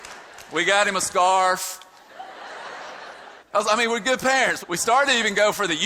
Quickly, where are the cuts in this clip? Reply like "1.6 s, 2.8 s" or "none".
3.4 s, 4.6 s